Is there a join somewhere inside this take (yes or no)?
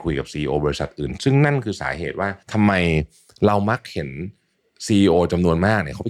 yes